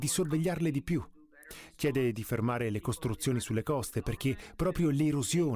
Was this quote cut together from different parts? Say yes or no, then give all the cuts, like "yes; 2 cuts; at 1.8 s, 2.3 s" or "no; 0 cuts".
no; 0 cuts